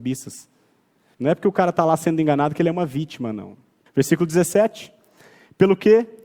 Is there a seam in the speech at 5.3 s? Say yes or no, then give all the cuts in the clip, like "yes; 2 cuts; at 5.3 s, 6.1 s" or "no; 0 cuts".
no; 2 cuts; at 1.1 s, 3.9 s